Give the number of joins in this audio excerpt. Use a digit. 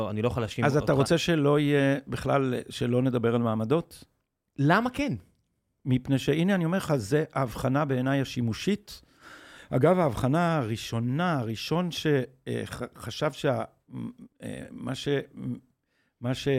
0